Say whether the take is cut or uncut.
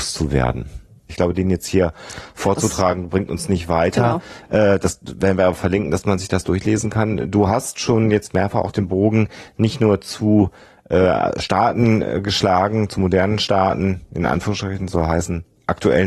cut